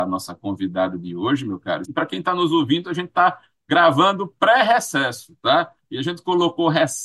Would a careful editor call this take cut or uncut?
cut